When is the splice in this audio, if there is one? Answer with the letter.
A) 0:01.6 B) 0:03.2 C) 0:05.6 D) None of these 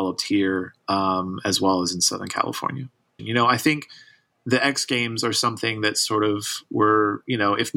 B